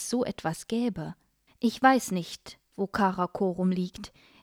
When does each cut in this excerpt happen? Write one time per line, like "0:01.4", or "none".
0:01.5